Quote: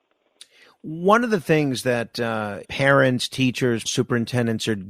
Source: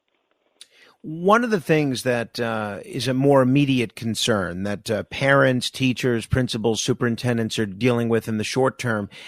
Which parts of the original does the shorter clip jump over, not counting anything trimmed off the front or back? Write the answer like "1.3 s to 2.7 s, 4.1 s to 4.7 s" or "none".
2.8 s to 5.1 s, 6.3 s to 6.8 s